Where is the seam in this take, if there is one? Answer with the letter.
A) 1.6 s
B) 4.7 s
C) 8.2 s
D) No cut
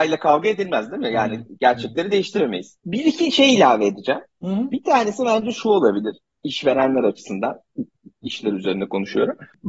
C